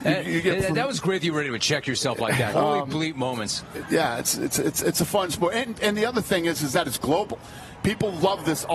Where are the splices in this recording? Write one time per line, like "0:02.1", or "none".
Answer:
0:02.5